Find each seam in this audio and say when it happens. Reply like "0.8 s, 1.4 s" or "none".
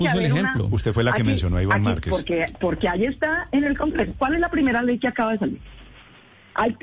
none

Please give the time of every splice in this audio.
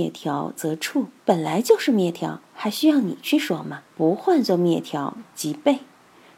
1.2 s, 3.9 s

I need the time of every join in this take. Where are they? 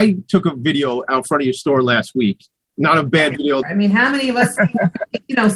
3.6 s

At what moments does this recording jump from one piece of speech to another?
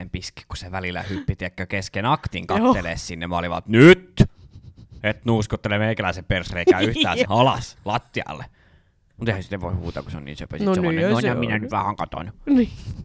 7.2 s

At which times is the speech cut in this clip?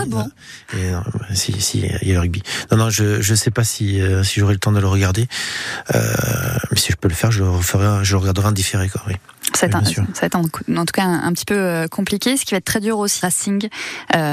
13.2 s

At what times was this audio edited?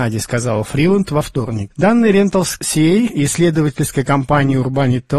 1.7 s

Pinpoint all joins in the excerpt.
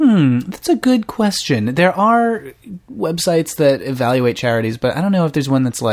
none

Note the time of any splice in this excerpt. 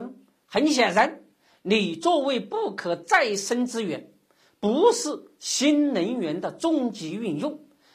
none

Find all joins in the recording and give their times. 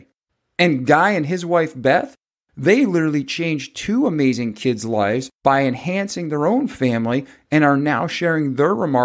none

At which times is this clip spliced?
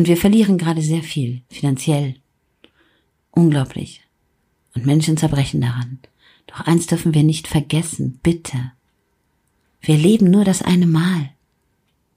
none

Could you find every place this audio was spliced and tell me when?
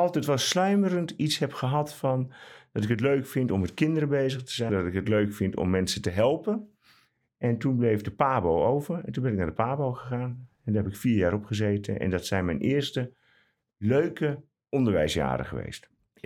4.7 s

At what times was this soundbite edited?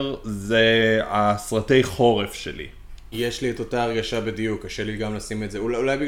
3.1 s

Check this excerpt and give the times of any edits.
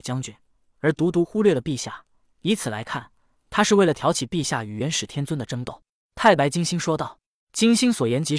none

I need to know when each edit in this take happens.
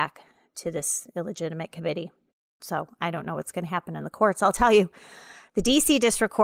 2.6 s

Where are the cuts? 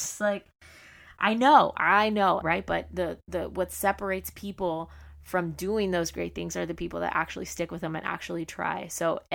2.4 s

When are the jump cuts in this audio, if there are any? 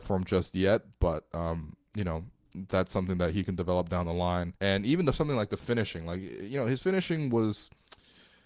4.6 s

